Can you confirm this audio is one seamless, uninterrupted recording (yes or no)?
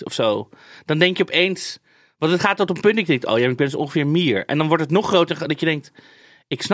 yes